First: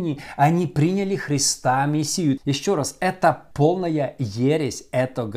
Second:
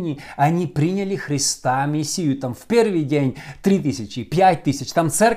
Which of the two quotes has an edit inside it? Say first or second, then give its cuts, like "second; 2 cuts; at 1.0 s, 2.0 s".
first; 2 cuts; at 2.4 s, 3.5 s